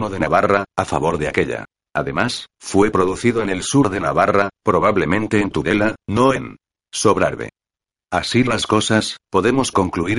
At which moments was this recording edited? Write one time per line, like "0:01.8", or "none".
0:01.9